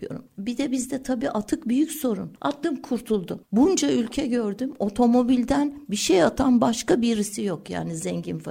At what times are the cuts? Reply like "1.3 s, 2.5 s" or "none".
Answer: 2.4 s